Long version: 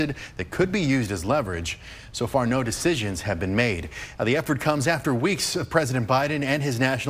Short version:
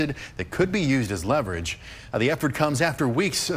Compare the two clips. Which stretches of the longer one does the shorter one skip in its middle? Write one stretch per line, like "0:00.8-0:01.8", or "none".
0:02.1-0:04.2